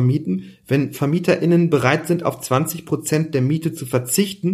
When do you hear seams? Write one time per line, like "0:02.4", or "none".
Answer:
none